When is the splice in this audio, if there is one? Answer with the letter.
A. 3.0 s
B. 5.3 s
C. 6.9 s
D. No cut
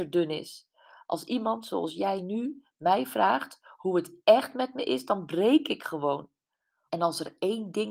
C